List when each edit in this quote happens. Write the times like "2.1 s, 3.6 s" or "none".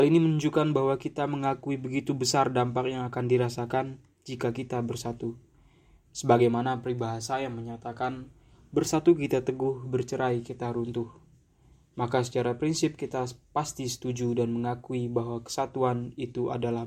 none